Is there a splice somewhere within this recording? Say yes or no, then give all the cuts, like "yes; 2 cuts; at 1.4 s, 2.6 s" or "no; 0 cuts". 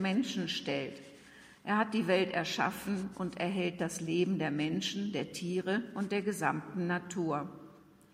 no; 0 cuts